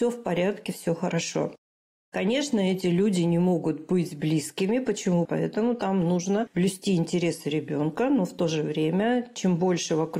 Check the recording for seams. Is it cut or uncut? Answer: cut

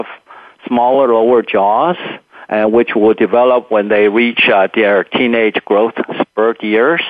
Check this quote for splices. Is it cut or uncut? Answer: uncut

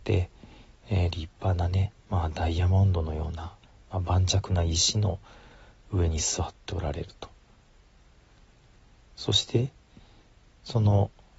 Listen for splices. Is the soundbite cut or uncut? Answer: uncut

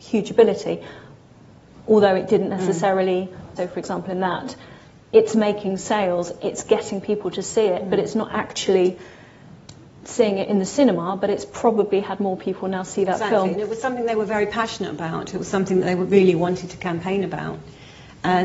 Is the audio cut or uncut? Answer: cut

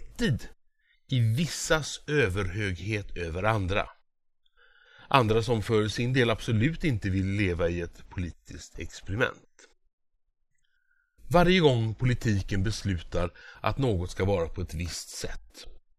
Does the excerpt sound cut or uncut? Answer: uncut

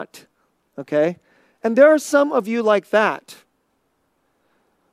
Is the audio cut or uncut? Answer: cut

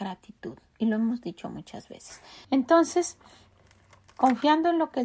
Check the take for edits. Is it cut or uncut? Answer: cut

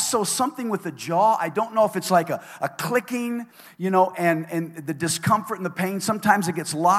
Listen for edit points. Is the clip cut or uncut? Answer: uncut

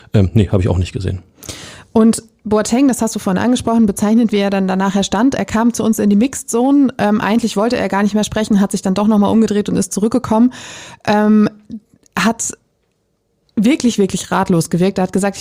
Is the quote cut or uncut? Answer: uncut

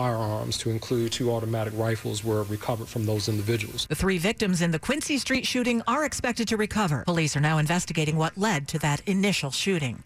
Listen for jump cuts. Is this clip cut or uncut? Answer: cut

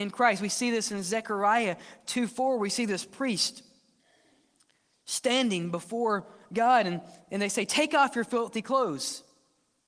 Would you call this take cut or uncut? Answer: uncut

